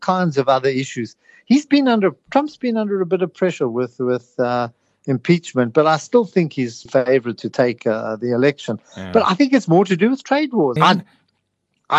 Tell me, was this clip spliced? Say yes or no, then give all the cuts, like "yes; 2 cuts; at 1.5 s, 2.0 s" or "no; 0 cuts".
yes; 2 cuts; at 6.9 s, 10.8 s